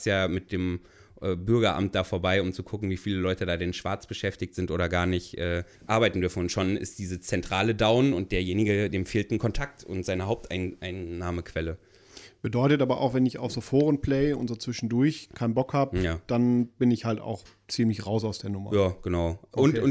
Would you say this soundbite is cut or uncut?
cut